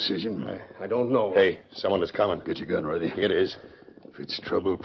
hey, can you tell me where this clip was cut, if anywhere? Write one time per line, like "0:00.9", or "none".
none